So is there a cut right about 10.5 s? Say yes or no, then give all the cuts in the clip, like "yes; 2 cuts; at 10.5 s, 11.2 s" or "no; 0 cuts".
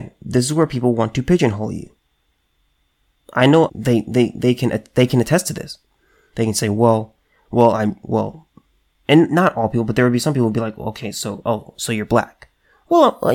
no; 1 cut; at 3.7 s